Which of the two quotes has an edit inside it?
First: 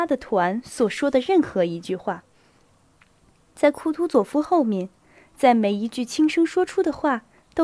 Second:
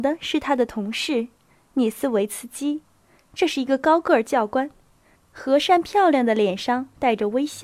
second; 1 cut; at 5.2 s

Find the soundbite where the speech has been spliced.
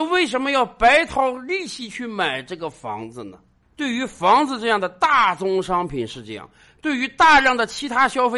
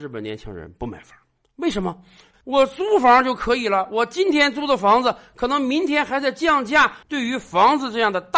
second; 2 cuts; at 2.3 s, 7.0 s

